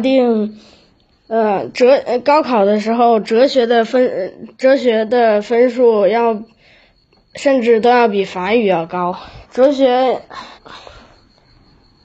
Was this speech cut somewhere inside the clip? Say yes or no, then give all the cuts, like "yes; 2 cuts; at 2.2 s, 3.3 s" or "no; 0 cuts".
yes; 3 cuts; at 1.1 s, 9.4 s, 10.6 s